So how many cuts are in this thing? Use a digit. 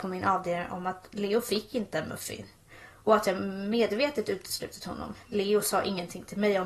1